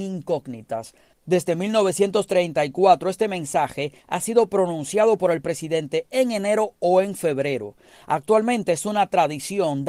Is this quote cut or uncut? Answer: cut